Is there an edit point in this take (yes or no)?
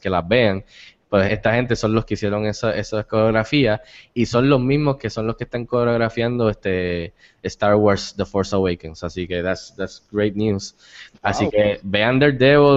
yes